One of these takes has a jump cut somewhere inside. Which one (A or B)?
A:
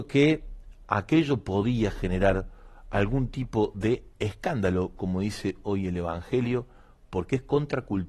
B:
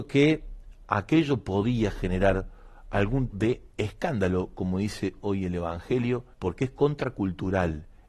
B